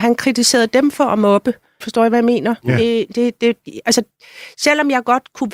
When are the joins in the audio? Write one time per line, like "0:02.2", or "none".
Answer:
0:01.8